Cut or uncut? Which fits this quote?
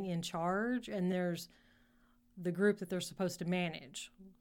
cut